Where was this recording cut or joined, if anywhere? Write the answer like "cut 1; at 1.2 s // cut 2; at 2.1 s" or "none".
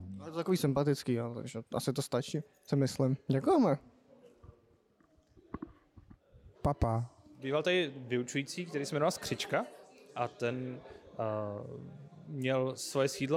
cut 1; at 6.5 s